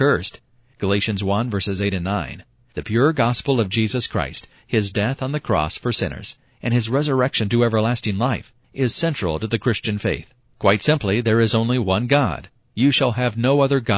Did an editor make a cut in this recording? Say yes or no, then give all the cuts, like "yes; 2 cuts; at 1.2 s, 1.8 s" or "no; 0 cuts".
yes; 2 cuts; at 10.5 s, 12.7 s